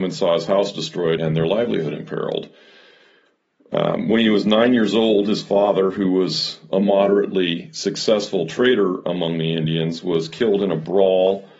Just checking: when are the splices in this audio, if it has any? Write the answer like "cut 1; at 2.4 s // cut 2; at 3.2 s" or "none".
cut 1; at 1.2 s